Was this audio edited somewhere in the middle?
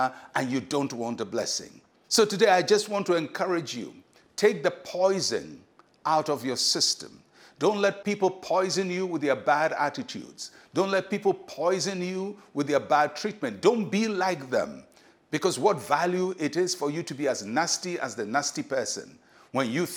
yes; 1 cut; at 2.0 s

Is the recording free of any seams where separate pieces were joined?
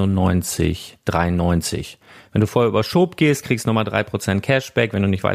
yes; 0 cuts

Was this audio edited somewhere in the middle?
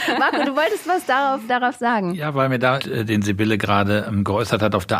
yes; 2 cuts; at 1.5 s, 2.8 s

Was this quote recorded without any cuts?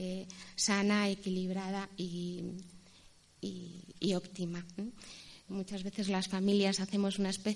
no; 1 cut; at 5.5 s

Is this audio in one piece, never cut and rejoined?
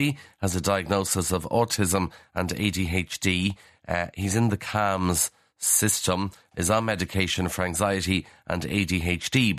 yes; 0 cuts

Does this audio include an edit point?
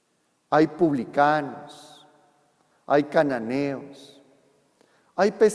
no; 0 cuts

